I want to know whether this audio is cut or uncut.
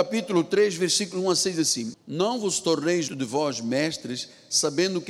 cut